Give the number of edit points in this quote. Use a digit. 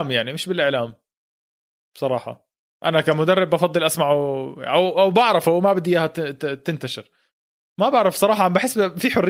0